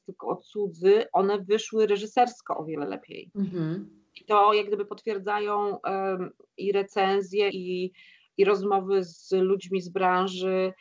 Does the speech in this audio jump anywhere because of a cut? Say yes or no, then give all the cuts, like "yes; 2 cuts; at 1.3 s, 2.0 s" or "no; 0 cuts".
yes; 1 cut; at 7.5 s